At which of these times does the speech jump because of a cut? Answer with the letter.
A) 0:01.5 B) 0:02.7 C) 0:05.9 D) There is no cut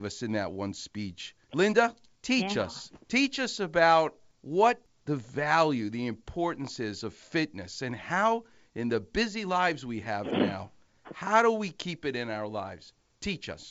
D